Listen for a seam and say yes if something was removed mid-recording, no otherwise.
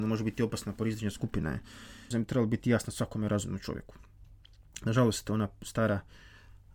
yes